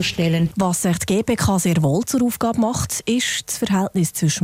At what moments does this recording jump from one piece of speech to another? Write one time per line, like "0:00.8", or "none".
none